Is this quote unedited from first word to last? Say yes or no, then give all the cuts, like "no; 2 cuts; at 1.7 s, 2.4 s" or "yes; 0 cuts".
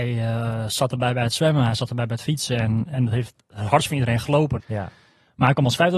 no; 1 cut; at 4.6 s